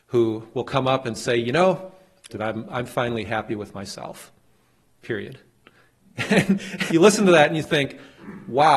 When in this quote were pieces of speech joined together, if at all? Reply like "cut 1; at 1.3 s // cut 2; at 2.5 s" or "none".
cut 1; at 2.3 s // cut 2; at 6.9 s